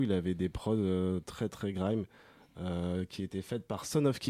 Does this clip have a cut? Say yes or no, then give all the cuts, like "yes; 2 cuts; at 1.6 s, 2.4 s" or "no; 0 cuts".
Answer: no; 0 cuts